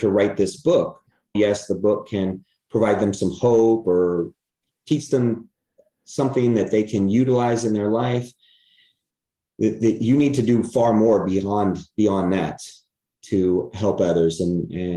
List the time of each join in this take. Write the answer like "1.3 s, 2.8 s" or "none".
1.3 s

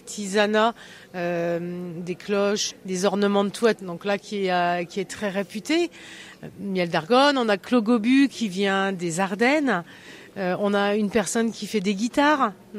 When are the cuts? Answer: 2.7 s, 3.7 s

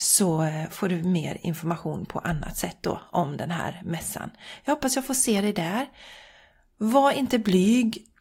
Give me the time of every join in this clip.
none

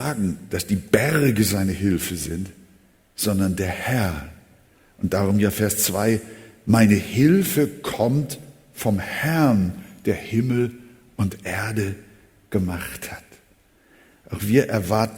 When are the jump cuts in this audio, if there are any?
none

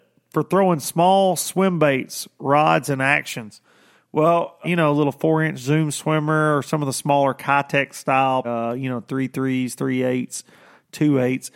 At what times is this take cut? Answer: 4.6 s, 8.4 s

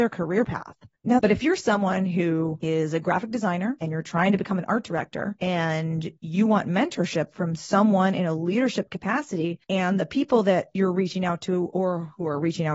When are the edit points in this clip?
1.2 s

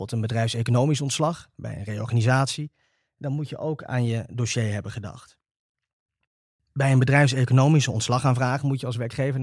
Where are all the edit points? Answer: none

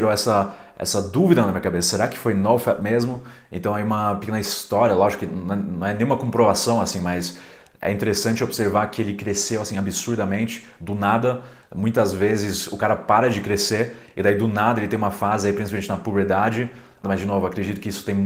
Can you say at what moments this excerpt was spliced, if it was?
11.6 s, 17.0 s

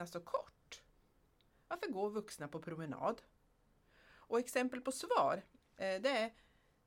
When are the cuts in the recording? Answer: 5.8 s

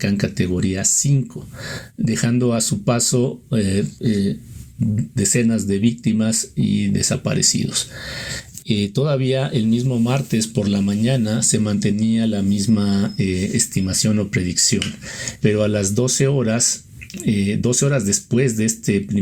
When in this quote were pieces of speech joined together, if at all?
3.9 s, 8.6 s, 15.4 s

